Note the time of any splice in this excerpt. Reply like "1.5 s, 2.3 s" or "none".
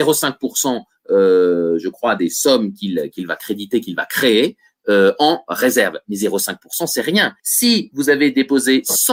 7.4 s